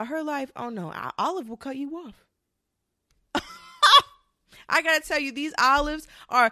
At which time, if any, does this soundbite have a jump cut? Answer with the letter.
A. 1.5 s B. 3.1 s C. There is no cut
B